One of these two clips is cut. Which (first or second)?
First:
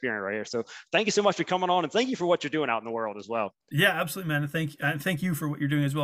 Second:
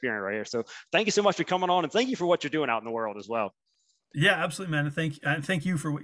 first